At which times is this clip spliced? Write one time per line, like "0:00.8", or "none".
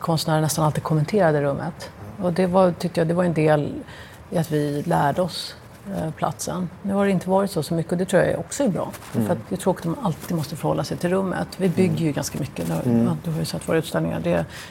0:09.4

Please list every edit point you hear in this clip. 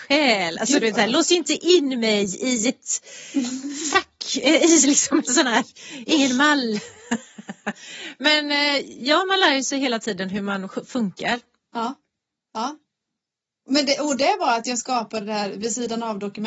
none

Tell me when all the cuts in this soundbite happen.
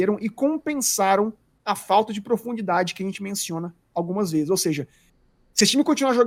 none

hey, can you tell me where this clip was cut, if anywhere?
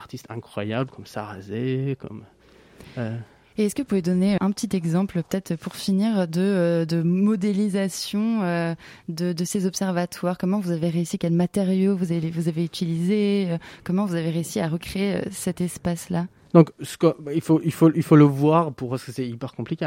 0:04.4

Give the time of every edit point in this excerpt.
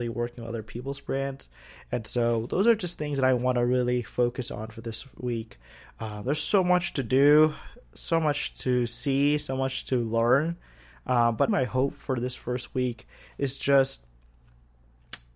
0:11.5

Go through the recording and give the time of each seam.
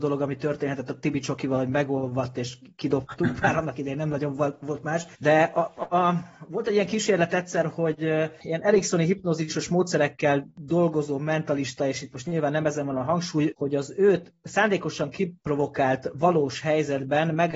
0:05.1
0:13.5

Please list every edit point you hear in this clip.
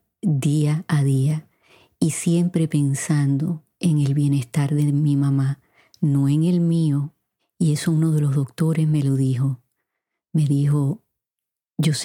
none

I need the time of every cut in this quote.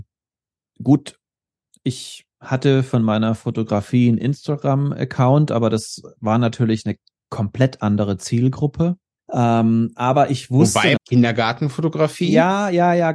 0:09.2
0:11.0

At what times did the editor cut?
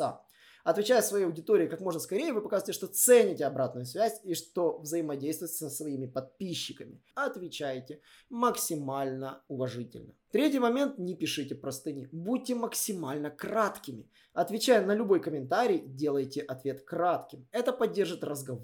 0:07.1

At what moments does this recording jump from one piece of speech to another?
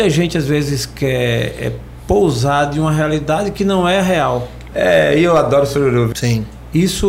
0:04.7
0:06.1

